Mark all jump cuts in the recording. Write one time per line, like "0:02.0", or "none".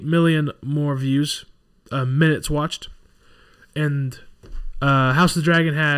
none